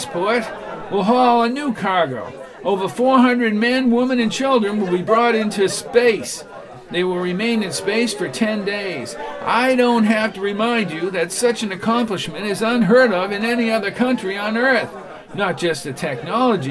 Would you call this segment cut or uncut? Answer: uncut